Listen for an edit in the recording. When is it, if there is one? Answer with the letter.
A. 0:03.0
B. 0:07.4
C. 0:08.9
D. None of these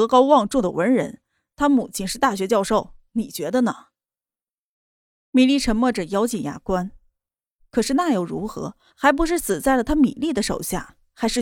C